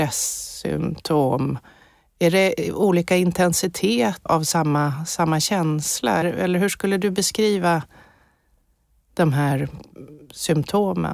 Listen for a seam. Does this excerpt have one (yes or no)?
yes